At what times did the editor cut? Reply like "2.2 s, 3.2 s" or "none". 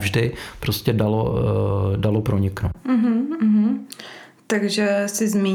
none